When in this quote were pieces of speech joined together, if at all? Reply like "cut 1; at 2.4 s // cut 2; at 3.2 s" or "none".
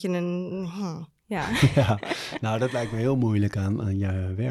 none